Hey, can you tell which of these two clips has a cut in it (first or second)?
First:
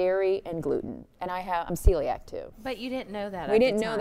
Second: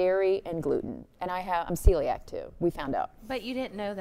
first